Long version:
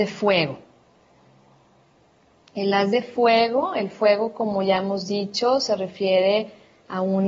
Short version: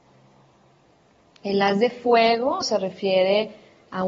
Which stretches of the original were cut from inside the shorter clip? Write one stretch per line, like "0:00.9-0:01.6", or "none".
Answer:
0:03.7-0:05.6